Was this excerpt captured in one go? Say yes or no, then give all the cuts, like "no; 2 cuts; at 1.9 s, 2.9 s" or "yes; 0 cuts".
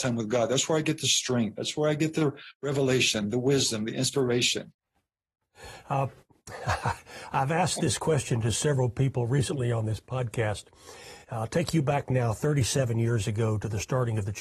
yes; 0 cuts